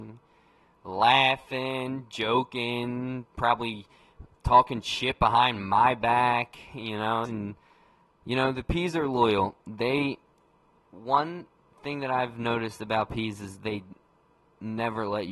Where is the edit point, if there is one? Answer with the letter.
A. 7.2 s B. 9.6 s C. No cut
A